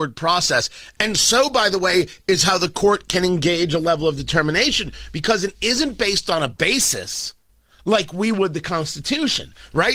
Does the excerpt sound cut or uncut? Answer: uncut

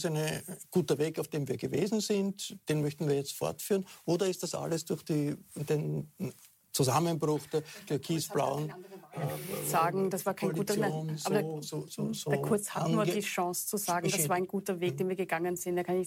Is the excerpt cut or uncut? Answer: uncut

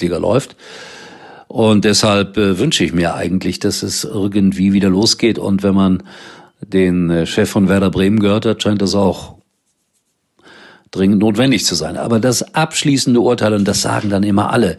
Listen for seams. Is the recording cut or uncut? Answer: uncut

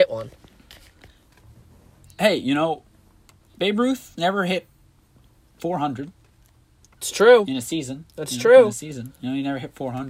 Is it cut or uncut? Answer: uncut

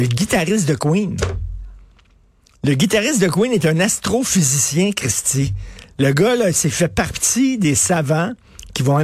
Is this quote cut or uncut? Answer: uncut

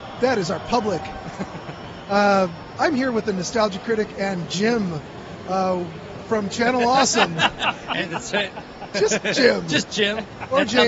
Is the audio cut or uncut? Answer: uncut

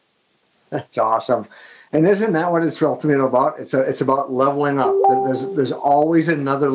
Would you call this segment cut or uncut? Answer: uncut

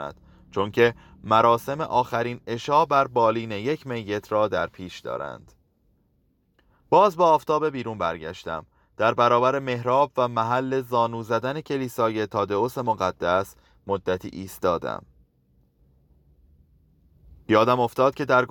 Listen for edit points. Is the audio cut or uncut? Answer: uncut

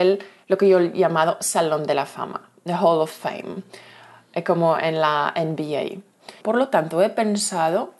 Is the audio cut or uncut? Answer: cut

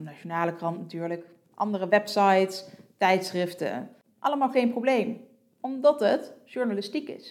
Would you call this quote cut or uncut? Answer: uncut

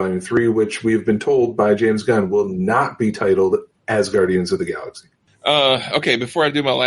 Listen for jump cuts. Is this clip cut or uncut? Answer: uncut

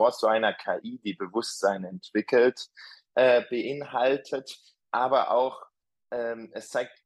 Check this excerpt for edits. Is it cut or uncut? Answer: uncut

